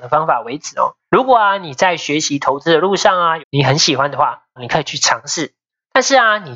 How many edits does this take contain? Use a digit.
3